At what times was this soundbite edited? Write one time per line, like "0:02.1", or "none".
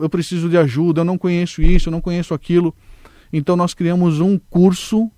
none